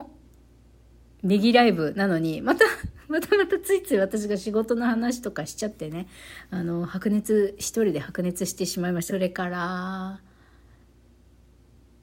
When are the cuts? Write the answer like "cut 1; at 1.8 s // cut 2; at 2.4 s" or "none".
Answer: cut 1; at 9.1 s